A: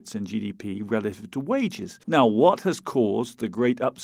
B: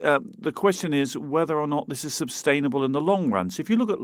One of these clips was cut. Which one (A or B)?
A